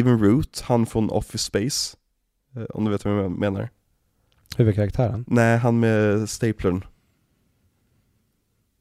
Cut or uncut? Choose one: uncut